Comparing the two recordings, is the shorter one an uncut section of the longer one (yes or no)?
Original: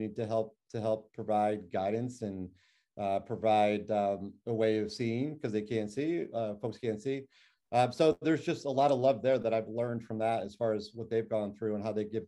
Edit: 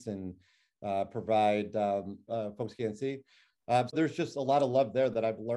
no